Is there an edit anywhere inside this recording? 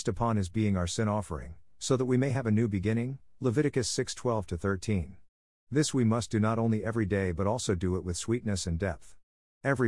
no; 0 cuts

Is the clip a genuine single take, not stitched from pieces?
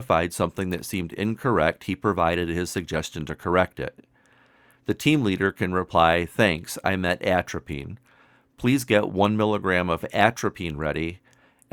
yes; 0 cuts

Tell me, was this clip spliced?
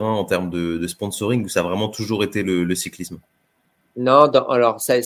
no; 0 cuts

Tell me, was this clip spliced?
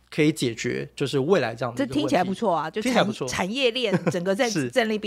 no; 0 cuts

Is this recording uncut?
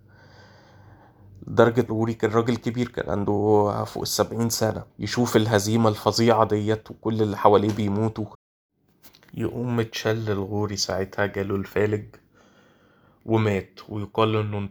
no; 2 cuts; at 1.9 s, 4.9 s

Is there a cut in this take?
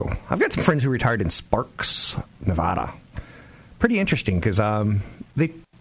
no; 0 cuts

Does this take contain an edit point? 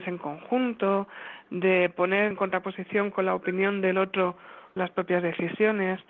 yes; 2 cuts; at 2.3 s, 4.8 s

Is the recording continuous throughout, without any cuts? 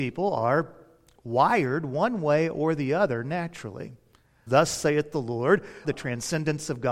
no; 2 cuts; at 4.5 s, 5.8 s

